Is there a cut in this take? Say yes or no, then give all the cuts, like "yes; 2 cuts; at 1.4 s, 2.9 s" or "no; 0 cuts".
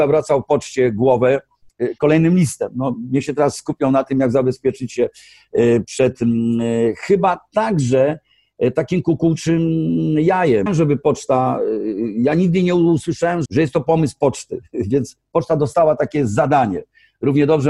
yes; 2 cuts; at 10.7 s, 13.4 s